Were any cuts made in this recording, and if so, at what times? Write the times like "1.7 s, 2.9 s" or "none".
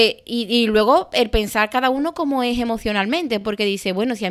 none

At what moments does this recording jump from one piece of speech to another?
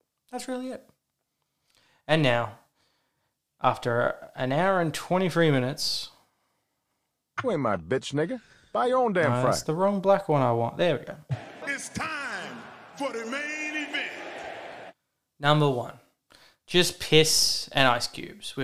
11.6 s

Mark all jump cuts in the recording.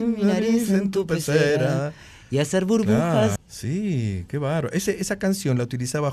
3.4 s

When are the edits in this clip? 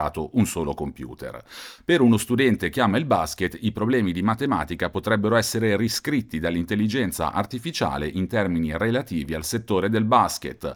1.8 s

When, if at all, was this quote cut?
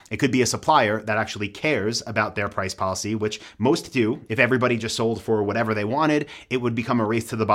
4.3 s

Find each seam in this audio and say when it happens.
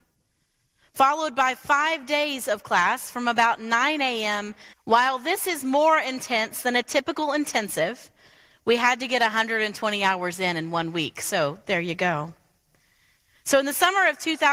4.7 s

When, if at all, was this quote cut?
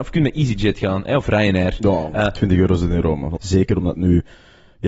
3.4 s

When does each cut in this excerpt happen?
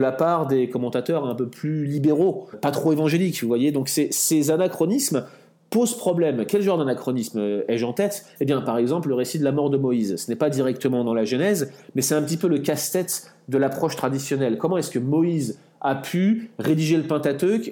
2.5 s

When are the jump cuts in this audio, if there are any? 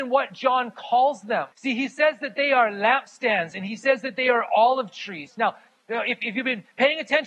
1.5 s

